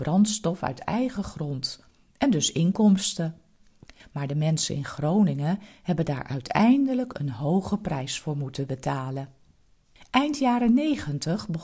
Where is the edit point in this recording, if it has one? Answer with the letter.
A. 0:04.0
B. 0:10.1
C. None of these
A